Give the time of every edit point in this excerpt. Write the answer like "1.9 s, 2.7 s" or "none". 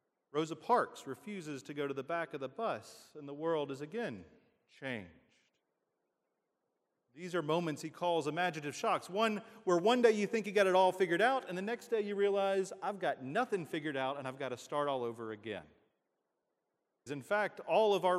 17.1 s